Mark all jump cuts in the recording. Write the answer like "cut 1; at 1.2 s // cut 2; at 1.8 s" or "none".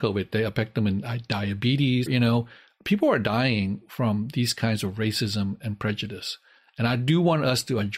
cut 1; at 2.1 s